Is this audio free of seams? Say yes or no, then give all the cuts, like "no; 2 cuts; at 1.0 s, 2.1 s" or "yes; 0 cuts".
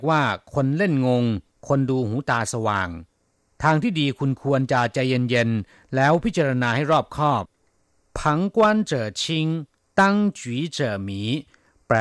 yes; 0 cuts